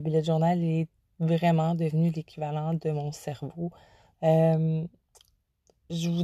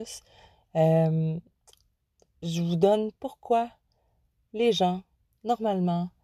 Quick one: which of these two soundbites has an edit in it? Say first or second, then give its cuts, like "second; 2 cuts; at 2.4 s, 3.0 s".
first; 1 cut; at 4.1 s